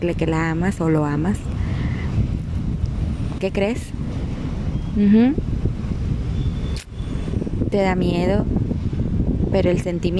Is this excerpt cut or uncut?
cut